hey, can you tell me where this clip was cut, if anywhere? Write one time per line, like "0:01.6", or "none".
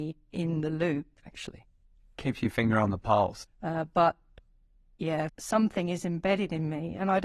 0:01.2
0:03.4
0:05.3